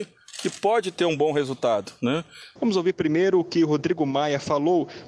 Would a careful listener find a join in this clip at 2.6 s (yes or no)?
yes